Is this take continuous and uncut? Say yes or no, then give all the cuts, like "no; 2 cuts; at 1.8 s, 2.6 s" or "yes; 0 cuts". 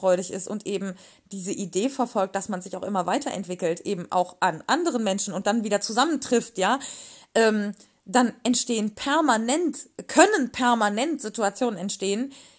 yes; 0 cuts